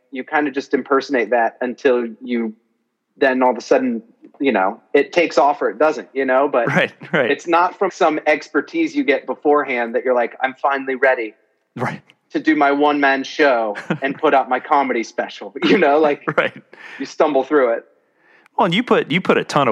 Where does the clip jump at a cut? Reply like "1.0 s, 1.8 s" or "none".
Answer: 7.9 s